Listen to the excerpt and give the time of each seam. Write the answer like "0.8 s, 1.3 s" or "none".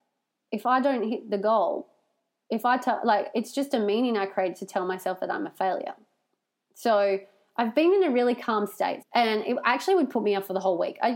9.0 s